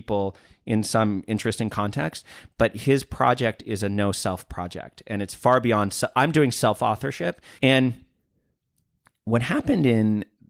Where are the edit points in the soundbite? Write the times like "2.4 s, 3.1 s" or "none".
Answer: 7.6 s

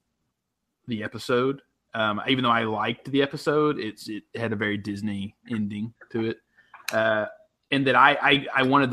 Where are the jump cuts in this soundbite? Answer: none

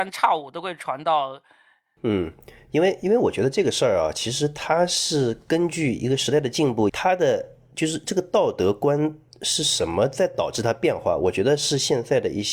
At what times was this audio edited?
2.0 s, 6.9 s

